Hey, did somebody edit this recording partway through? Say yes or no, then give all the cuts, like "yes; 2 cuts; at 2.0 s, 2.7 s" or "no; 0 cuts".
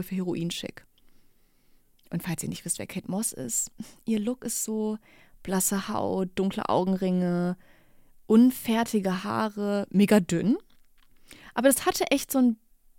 no; 0 cuts